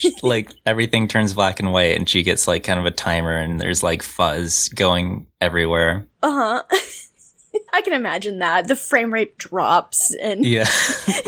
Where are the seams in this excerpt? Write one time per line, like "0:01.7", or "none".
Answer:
0:07.7
0:09.4